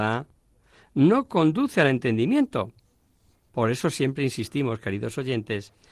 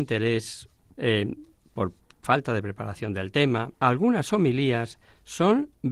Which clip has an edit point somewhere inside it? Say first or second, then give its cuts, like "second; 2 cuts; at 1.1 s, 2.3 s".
second; 2 cuts; at 0.9 s, 3.7 s